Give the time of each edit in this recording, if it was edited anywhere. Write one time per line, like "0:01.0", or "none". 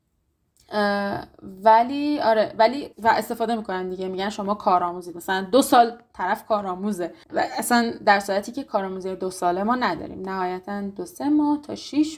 0:02.9
0:07.2